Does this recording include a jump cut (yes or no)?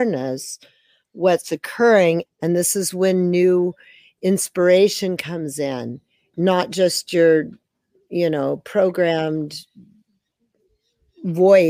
yes